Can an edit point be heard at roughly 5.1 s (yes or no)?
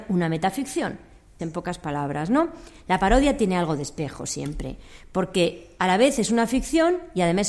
no